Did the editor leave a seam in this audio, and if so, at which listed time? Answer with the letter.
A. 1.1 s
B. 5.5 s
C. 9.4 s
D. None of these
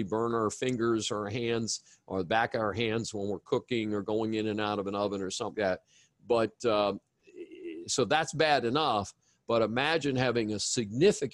B